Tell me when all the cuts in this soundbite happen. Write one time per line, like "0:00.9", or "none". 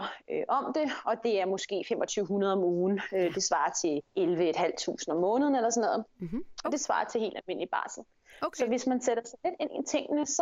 0:04.1
0:06.6